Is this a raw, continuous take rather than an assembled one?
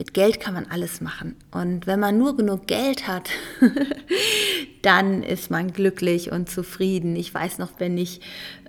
no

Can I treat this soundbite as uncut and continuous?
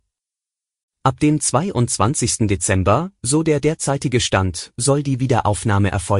yes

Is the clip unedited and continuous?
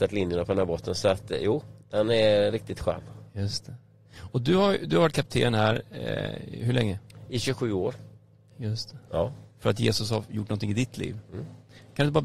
no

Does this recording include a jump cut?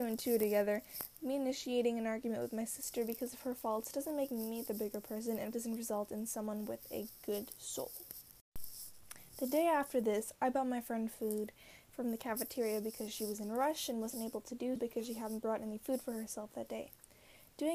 yes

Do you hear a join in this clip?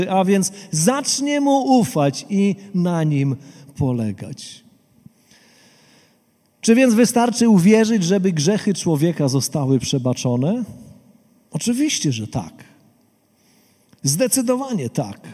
no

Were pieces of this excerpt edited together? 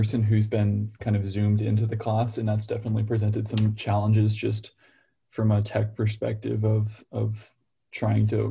no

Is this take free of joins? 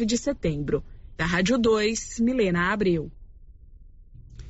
no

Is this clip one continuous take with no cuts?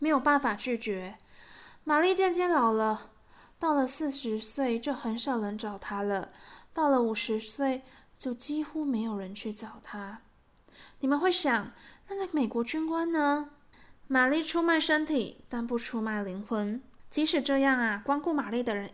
no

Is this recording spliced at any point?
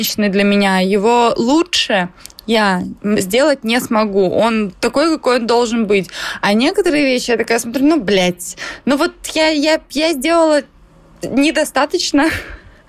yes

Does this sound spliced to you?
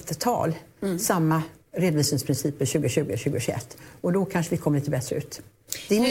no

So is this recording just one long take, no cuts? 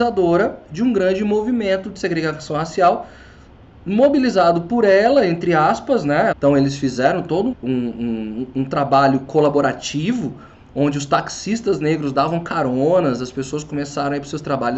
no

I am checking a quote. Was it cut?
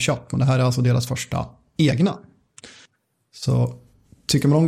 no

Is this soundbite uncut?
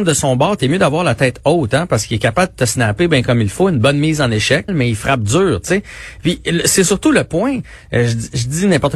no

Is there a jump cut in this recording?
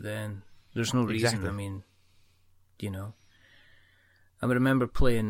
no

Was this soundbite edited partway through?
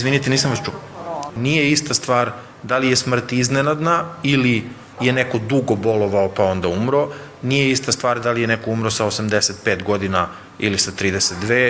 yes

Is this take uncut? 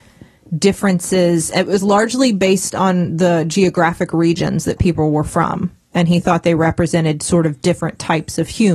yes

